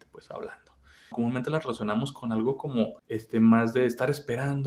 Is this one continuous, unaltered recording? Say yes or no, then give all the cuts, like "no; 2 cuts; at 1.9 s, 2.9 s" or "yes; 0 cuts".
no; 2 cuts; at 1.1 s, 3.0 s